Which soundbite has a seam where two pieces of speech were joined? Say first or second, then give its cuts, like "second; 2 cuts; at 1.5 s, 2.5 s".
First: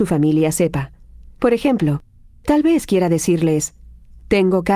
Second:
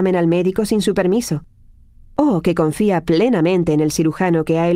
first; 1 cut; at 1.4 s